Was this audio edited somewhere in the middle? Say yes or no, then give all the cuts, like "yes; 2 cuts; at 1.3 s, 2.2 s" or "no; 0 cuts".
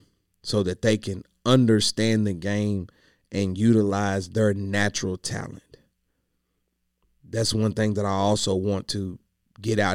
no; 0 cuts